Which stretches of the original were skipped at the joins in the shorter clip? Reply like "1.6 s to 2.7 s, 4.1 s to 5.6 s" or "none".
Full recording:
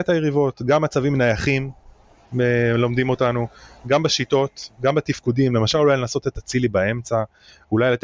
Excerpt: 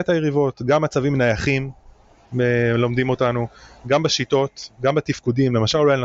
none